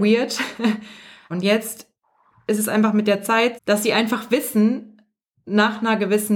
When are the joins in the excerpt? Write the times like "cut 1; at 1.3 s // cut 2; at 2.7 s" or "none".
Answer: cut 1; at 1.3 s // cut 2; at 3.6 s